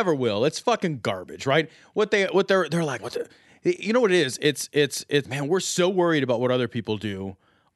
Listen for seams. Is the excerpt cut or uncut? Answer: cut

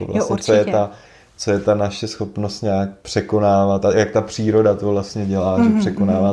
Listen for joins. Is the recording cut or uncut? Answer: uncut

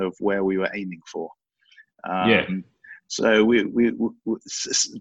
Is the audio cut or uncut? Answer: uncut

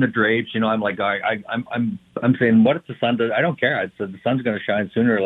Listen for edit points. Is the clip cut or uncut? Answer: uncut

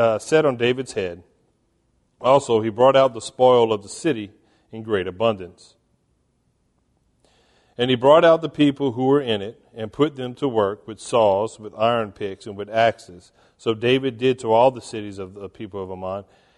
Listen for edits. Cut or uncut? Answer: uncut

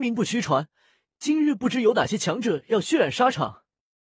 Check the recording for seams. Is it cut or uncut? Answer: uncut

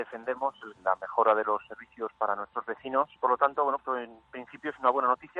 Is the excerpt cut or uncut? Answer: cut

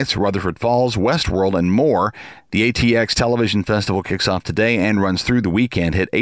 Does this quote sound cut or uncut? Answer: uncut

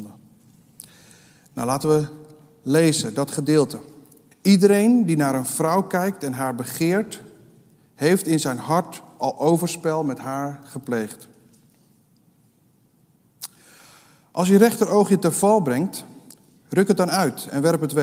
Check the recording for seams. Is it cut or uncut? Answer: cut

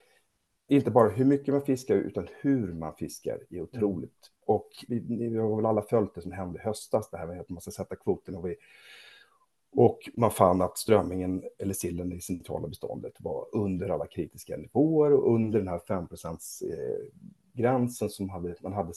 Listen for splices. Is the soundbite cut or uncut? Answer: cut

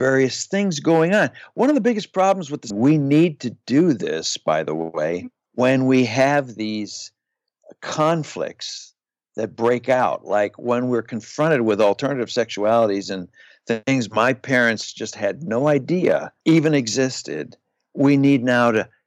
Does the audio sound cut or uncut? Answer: cut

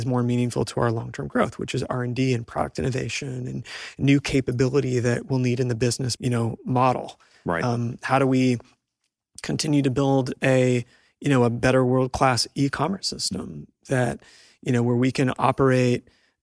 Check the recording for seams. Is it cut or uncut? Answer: cut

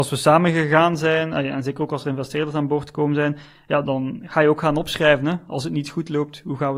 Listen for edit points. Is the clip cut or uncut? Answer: cut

